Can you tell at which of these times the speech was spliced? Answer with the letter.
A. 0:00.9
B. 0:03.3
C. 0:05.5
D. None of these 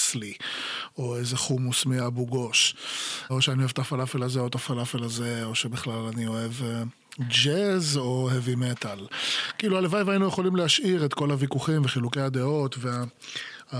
B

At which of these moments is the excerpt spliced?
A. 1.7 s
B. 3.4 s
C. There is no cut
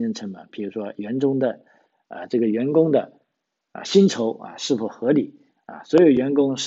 C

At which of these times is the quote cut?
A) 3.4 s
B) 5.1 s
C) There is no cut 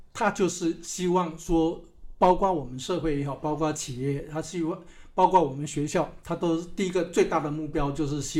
C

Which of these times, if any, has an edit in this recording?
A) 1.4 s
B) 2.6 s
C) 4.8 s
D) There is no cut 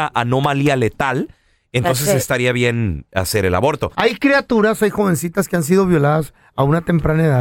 D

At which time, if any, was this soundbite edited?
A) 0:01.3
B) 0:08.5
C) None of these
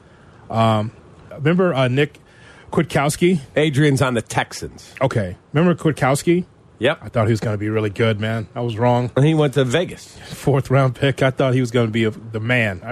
A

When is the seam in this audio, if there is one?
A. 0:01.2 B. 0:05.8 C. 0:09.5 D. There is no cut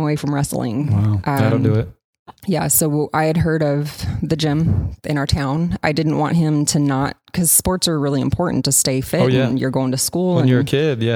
B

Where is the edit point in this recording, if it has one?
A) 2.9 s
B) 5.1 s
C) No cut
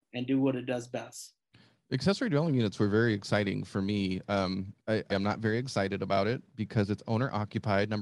B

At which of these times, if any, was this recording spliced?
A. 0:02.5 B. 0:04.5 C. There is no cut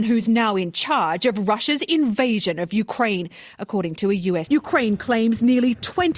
B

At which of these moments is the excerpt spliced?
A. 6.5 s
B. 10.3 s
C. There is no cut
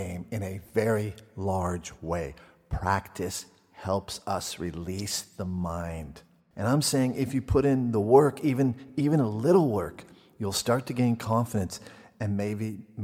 A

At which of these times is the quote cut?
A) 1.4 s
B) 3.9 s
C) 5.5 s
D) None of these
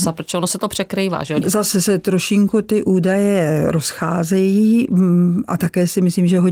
A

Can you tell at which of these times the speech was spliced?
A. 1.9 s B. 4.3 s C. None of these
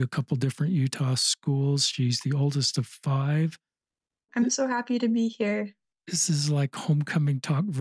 B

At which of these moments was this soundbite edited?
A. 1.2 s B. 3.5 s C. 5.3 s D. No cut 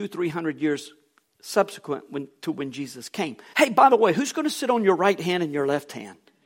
B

